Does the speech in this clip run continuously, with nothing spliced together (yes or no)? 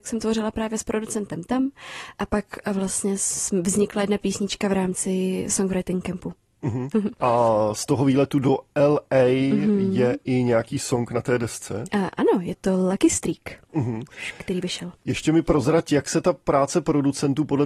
no